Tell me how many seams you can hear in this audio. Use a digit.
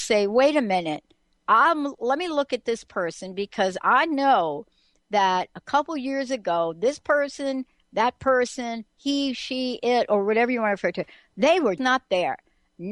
1